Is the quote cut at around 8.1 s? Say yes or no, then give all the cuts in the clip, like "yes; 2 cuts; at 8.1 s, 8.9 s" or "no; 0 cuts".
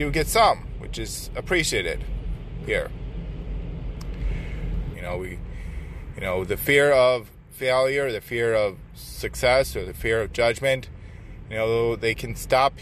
no; 1 cut; at 4.9 s